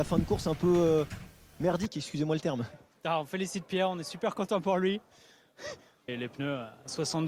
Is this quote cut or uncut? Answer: cut